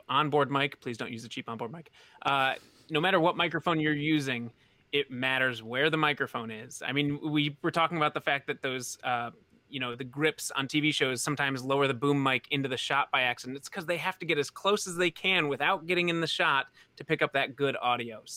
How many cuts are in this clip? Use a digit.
0